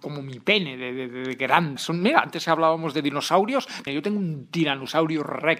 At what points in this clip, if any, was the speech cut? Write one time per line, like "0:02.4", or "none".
0:01.8
0:03.9